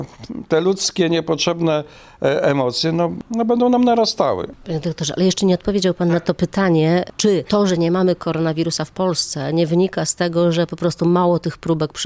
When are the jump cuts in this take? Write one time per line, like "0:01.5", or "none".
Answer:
none

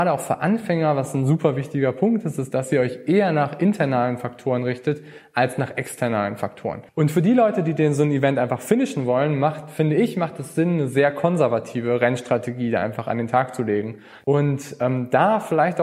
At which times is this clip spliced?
0:06.9
0:14.2

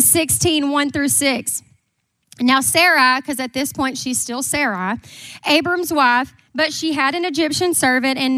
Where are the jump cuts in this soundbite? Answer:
0:06.5

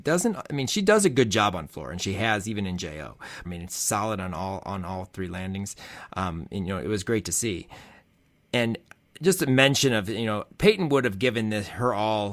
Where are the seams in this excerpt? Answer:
0:03.4

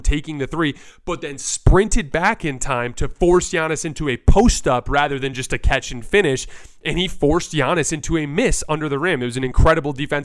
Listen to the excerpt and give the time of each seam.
none

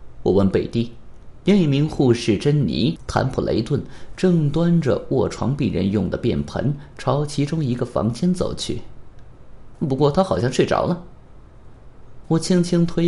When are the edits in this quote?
0:09.7

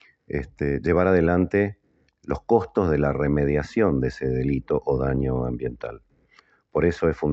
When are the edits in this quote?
none

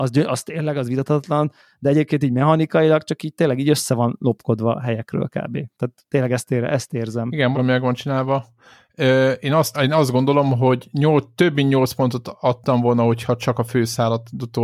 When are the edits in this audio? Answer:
0:07.5
0:09.7

